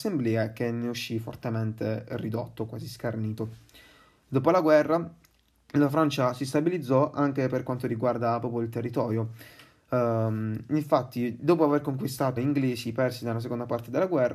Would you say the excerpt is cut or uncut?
cut